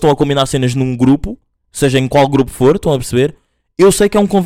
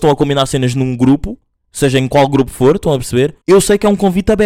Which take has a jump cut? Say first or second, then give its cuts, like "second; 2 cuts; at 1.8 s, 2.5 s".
second; 1 cut; at 3.4 s